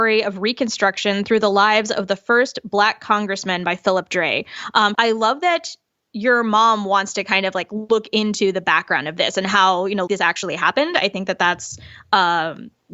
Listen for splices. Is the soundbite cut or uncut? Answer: cut